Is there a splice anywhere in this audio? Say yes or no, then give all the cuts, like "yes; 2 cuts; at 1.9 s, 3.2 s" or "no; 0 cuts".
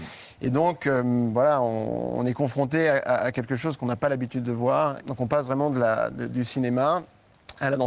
yes; 1 cut; at 5.0 s